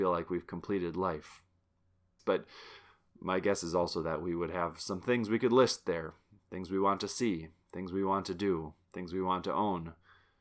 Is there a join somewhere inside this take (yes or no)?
yes